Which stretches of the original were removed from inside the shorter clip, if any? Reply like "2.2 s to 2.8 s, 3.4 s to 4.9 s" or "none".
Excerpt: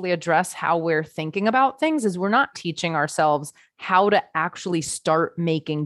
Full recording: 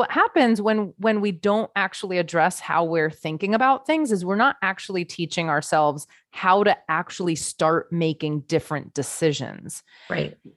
4.6 s to 5.1 s